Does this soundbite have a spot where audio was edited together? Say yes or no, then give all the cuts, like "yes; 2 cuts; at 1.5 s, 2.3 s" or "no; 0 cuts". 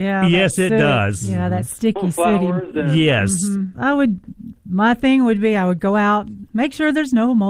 yes; 1 cut; at 3.7 s